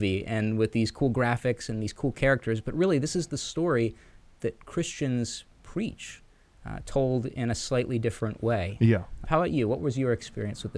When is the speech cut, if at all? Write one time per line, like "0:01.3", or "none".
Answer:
0:09.2